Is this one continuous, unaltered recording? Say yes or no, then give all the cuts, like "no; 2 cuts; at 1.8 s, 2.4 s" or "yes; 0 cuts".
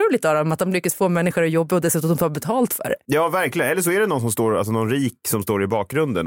yes; 0 cuts